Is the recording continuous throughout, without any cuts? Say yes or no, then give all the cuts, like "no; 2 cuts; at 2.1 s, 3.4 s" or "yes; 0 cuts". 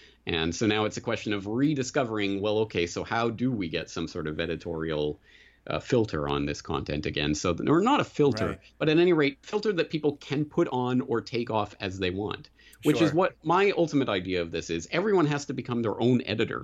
no; 1 cut; at 9.4 s